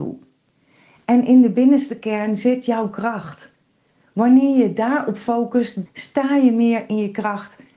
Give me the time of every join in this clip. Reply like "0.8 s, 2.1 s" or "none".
5.9 s